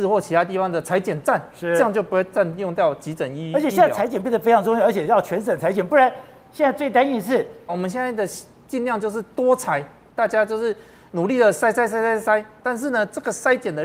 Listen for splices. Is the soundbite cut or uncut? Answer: cut